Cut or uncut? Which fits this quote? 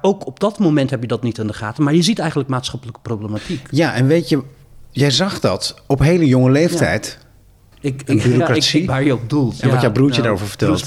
cut